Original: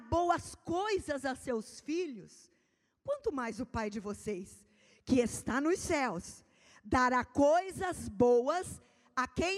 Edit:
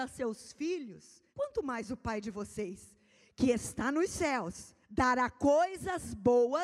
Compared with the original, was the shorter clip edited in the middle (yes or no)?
yes